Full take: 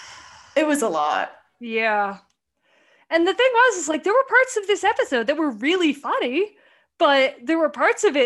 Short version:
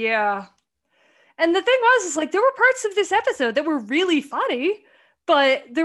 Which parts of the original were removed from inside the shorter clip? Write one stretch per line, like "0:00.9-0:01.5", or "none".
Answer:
none

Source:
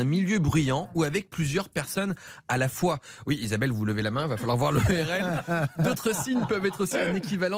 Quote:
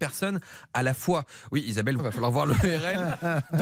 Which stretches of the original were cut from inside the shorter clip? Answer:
0:03.7-0:04.2

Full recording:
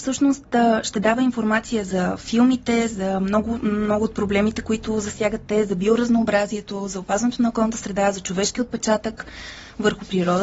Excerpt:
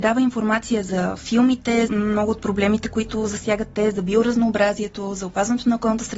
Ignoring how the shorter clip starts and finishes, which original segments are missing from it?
0:02.9-0:03.6

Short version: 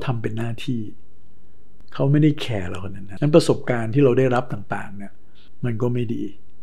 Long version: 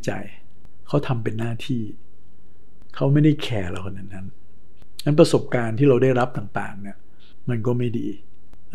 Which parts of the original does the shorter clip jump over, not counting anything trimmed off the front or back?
0:04.2-0:05.0

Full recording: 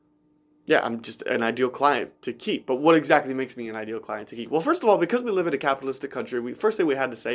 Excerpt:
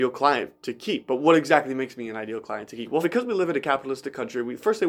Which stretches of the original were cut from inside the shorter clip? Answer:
0:04.6-0:05.0

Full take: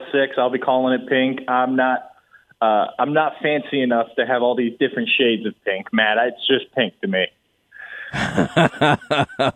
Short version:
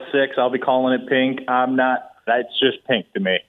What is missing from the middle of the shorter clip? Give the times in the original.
0:02.3-0:06.1

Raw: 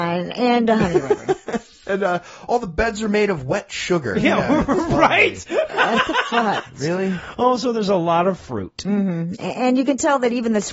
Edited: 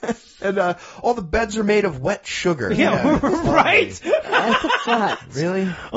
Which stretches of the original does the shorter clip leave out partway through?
none

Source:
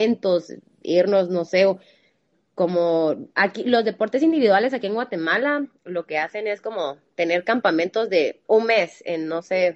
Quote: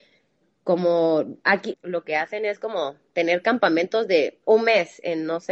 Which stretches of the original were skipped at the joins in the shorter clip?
0:03.6-0:05.7

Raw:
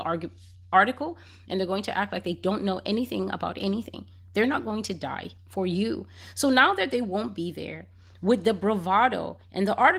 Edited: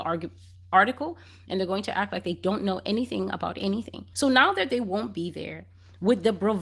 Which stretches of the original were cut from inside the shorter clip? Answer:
0:04.1-0:06.3

